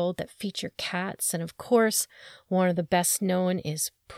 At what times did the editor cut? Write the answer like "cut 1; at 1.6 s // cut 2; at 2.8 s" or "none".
none